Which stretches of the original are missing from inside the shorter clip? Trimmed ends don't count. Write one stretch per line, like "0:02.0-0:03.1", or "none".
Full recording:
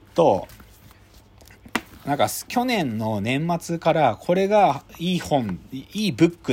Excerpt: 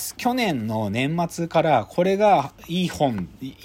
none